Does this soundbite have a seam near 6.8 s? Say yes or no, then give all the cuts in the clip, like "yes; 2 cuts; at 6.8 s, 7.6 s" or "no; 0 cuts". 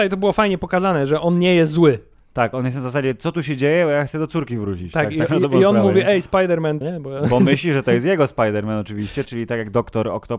yes; 2 cuts; at 6.8 s, 9.2 s